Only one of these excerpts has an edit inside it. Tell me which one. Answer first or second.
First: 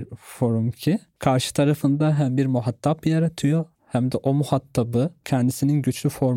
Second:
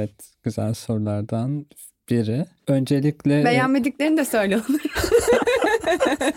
first